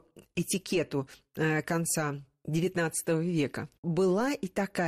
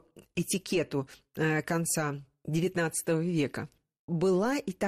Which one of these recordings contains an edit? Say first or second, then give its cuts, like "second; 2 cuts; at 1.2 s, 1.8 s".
first; 1 cut; at 3.8 s